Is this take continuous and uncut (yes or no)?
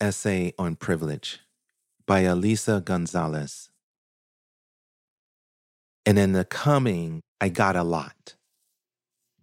no